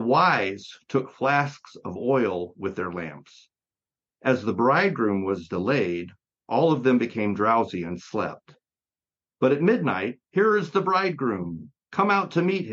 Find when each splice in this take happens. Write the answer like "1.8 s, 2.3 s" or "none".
10.3 s